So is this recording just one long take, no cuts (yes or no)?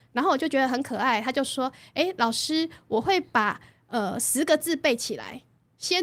yes